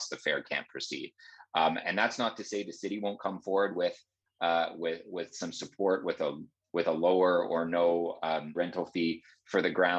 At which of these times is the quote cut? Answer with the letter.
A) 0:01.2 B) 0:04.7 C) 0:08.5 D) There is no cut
C